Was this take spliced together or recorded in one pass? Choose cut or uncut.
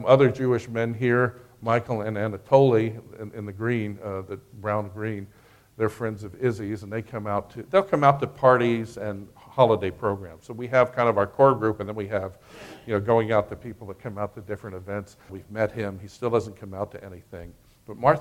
cut